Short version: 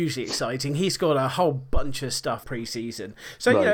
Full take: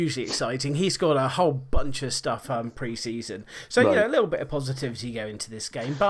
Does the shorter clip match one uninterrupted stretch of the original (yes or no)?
no